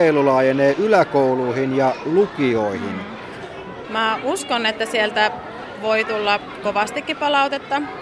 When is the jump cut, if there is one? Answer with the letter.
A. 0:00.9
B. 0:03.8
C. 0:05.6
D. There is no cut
B